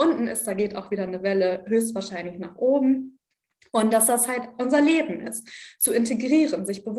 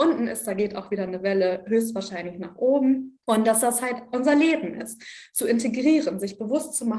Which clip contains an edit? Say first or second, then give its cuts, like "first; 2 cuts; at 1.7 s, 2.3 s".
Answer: second; 1 cut; at 3.2 s